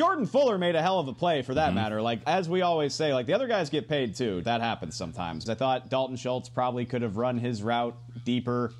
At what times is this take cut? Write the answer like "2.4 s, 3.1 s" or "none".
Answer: 2.2 s, 4.4 s, 5.5 s